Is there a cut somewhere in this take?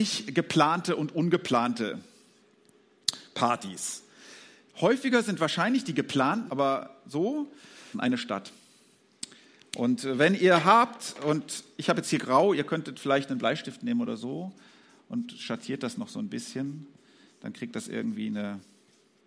yes; 2 cuts; at 6.5 s, 7.9 s

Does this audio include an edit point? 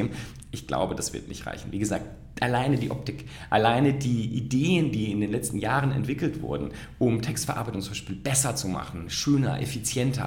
no; 0 cuts

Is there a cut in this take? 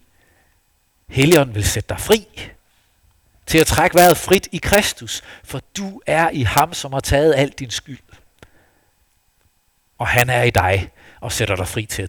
no; 0 cuts

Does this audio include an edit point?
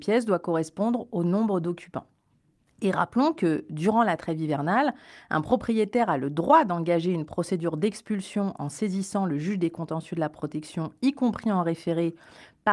no; 0 cuts

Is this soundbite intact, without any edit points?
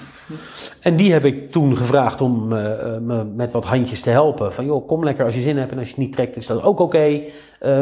yes; 0 cuts

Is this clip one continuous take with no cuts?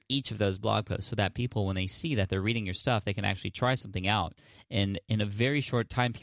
yes; 0 cuts

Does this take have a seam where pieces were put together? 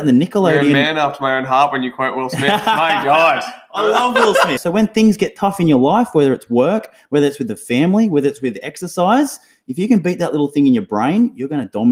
yes; 1 cut; at 4.6 s

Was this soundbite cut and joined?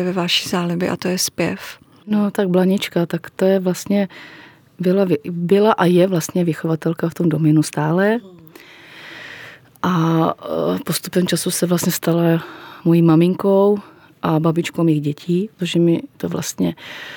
yes; 1 cut; at 15.6 s

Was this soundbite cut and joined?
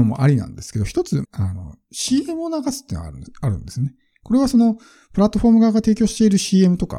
yes; 1 cut; at 1.2 s

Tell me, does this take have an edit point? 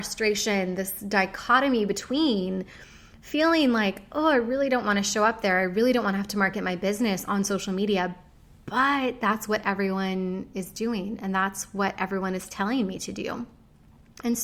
no; 0 cuts

